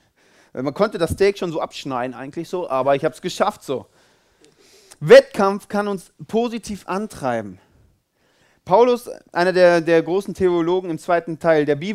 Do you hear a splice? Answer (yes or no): no